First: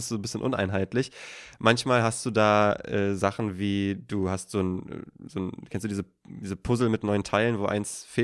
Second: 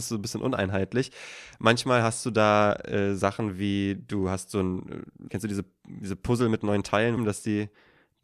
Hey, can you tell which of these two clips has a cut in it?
second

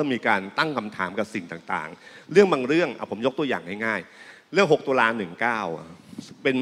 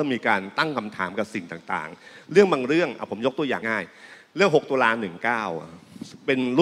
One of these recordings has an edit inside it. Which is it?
second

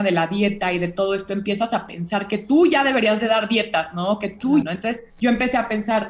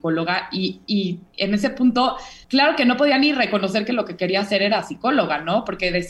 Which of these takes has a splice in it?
first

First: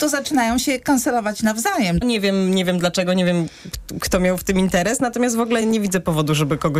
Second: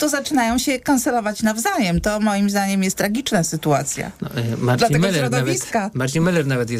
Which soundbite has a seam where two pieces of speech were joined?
first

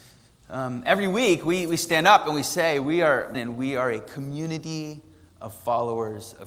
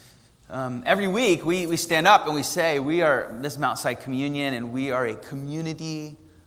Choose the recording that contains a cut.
first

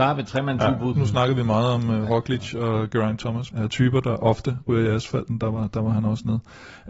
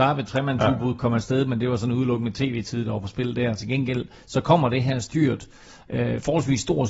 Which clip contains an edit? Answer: first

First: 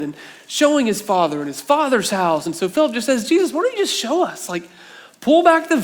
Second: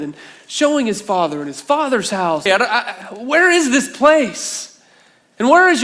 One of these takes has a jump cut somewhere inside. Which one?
second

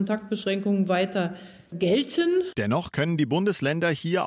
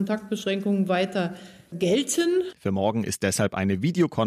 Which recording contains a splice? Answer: second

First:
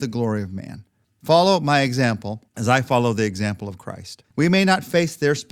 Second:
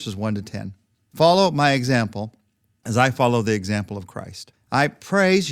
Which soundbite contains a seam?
first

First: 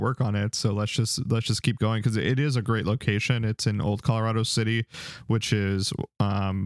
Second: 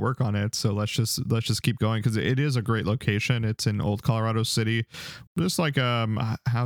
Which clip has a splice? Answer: second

